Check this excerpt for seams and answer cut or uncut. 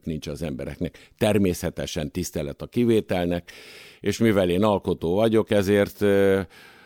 uncut